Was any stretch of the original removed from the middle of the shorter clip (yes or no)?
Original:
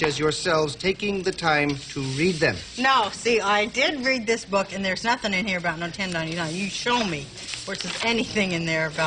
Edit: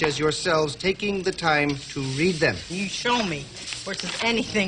yes